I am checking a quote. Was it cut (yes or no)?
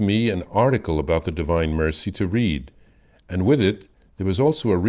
no